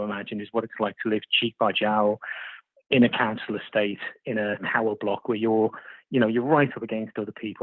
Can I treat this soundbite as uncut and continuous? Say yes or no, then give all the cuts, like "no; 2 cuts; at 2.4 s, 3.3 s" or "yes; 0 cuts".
yes; 0 cuts